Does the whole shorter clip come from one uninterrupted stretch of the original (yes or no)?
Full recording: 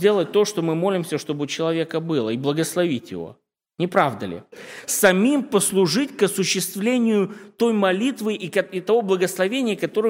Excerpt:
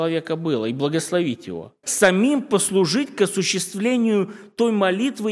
no